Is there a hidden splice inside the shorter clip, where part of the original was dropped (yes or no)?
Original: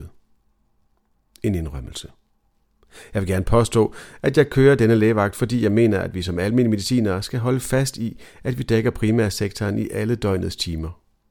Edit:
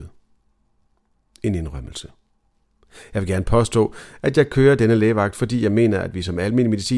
no